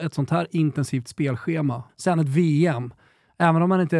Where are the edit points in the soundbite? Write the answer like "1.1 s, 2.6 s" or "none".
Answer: 1.9 s